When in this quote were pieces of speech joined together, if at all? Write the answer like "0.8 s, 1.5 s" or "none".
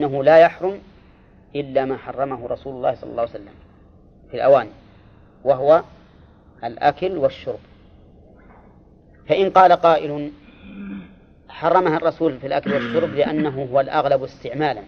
none